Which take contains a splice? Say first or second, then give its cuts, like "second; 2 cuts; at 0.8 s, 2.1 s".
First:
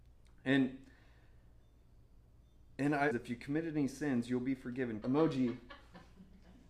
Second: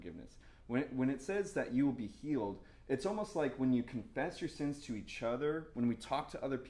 first; 2 cuts; at 3.1 s, 5.0 s